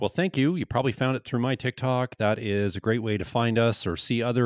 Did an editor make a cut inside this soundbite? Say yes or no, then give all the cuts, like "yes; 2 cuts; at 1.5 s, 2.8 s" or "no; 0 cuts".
no; 0 cuts